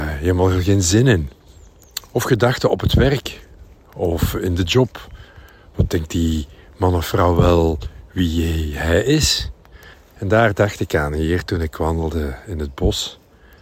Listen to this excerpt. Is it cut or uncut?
cut